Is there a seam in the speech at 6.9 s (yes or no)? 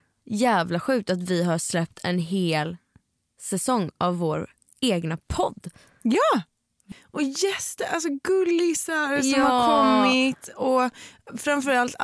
yes